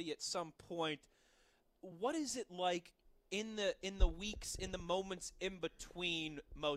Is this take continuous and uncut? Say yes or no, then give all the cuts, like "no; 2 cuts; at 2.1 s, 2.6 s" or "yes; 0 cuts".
yes; 0 cuts